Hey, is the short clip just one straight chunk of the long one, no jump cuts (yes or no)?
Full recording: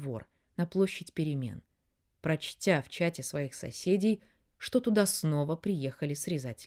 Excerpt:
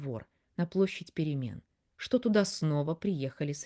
no